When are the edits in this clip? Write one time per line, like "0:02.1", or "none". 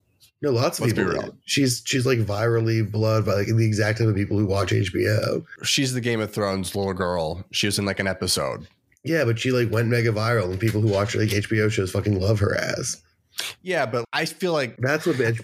0:14.0